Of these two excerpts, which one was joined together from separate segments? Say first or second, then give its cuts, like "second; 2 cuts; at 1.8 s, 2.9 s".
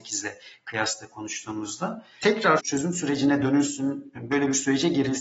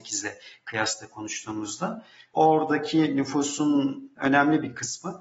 first; 1 cut; at 2.2 s